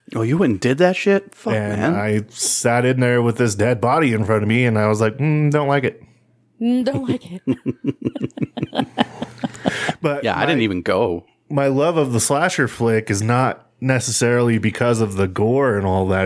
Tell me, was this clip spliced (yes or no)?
no